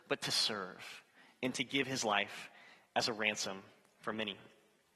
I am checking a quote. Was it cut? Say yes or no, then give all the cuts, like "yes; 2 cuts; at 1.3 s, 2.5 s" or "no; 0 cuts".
no; 0 cuts